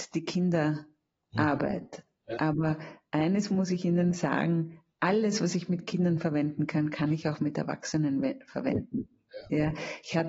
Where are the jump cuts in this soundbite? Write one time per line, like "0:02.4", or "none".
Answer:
none